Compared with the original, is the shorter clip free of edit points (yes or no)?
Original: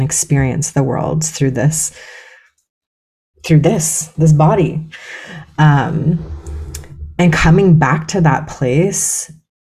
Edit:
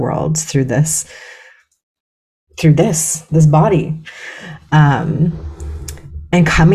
yes